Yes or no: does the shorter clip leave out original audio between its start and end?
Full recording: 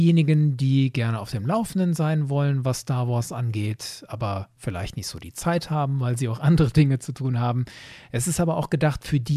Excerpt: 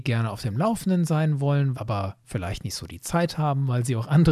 yes